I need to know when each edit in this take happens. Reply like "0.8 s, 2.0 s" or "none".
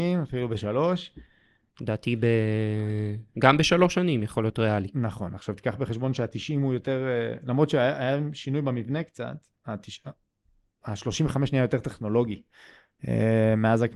1.7 s